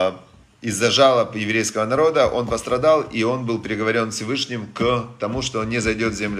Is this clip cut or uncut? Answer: uncut